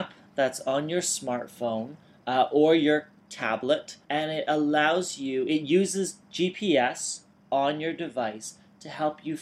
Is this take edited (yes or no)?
yes